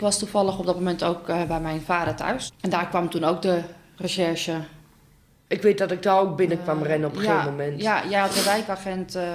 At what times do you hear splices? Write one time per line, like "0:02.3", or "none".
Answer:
none